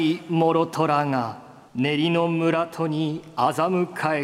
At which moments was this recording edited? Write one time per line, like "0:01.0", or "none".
0:01.7